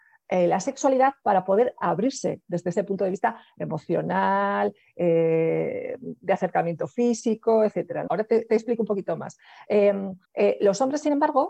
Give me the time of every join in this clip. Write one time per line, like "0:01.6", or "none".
0:08.1
0:10.2